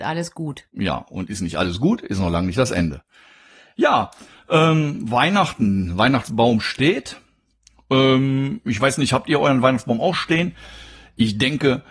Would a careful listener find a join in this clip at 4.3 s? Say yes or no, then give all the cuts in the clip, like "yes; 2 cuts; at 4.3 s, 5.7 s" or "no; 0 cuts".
no; 1 cut; at 10.1 s